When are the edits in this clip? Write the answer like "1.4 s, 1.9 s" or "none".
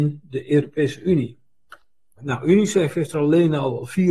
2.2 s